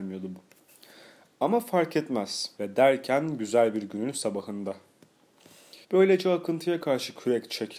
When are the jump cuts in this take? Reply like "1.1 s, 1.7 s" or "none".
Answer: 2.6 s, 5.8 s